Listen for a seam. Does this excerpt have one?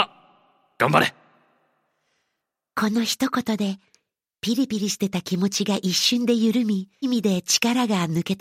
yes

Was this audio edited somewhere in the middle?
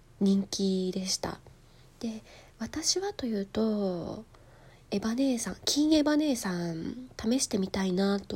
no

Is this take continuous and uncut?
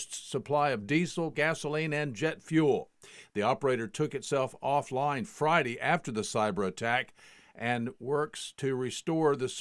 no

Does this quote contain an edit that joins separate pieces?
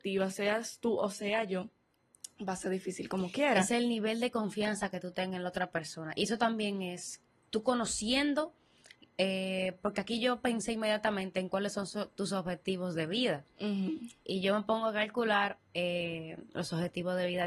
no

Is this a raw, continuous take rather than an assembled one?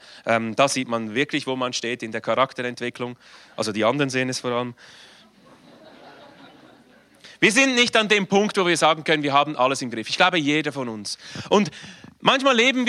yes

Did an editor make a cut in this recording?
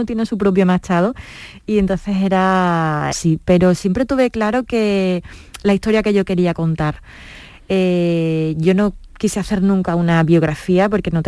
yes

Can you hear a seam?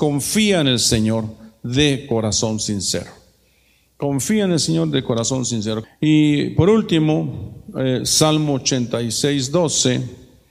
yes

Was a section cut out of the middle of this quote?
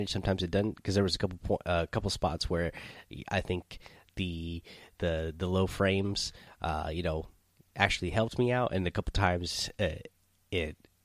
no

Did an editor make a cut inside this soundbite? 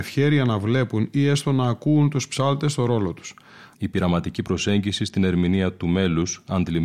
yes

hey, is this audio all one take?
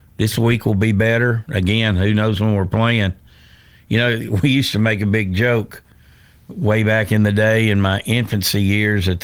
yes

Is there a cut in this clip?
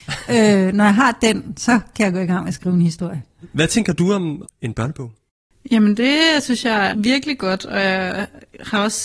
yes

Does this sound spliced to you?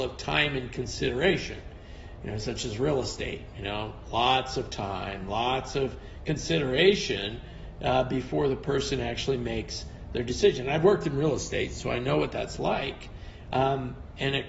no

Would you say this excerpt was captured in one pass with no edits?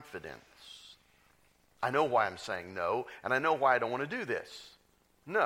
yes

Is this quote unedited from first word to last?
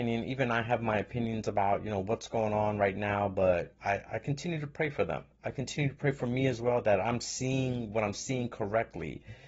yes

